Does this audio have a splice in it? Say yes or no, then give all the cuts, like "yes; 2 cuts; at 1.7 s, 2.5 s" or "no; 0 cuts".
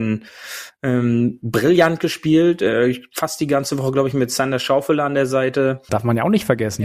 yes; 1 cut; at 5.9 s